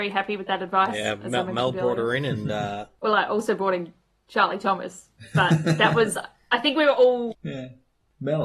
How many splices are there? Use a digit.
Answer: 1